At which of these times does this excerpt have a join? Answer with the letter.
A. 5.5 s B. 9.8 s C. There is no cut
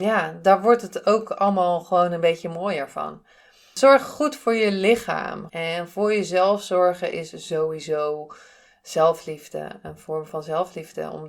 A